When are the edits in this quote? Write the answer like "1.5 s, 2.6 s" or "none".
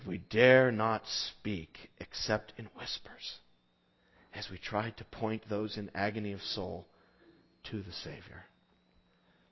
none